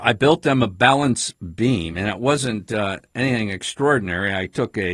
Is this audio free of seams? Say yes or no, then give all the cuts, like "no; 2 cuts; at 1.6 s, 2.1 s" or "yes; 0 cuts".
yes; 0 cuts